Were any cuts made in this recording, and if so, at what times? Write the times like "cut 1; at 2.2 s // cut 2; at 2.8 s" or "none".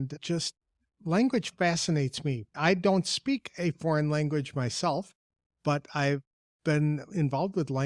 none